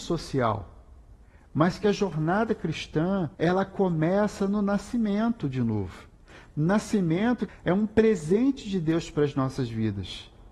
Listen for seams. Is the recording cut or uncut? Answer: cut